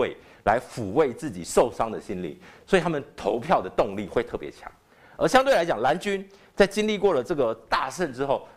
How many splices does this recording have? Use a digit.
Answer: 0